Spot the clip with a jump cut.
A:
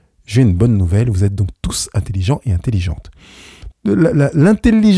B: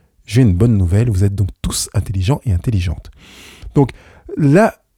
A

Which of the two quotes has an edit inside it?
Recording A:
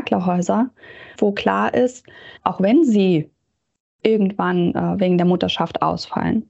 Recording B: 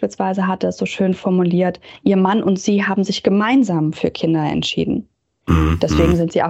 A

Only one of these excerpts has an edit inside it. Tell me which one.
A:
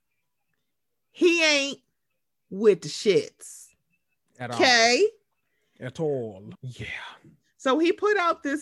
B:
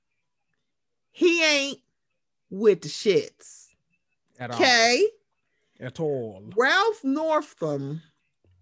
A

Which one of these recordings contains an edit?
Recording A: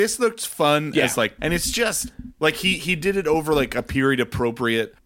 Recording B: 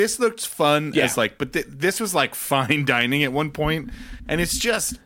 A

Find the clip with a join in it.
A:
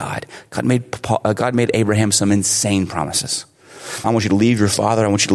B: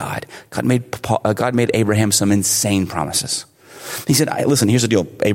A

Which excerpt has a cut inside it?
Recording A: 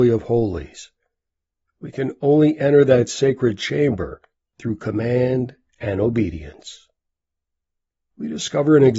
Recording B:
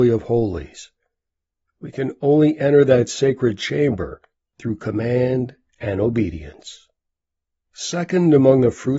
B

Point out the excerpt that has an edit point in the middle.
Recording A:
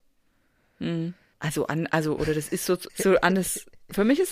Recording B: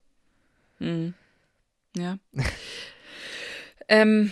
A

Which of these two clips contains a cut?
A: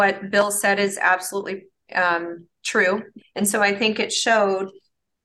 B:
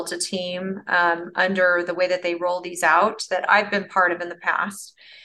A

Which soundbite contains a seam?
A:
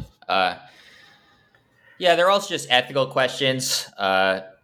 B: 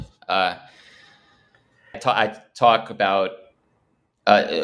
B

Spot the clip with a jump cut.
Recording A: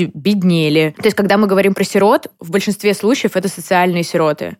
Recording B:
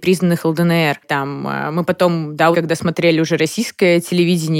B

